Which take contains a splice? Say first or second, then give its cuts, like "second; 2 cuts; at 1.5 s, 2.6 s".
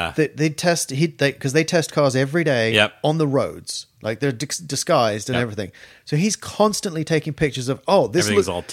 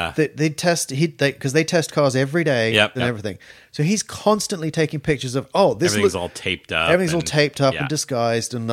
second; 1 cut; at 3.0 s